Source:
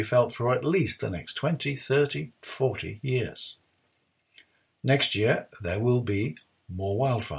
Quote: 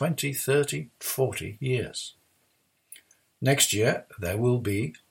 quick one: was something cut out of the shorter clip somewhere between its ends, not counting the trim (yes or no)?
no